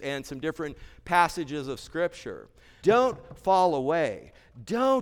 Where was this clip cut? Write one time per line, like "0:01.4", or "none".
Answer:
0:02.8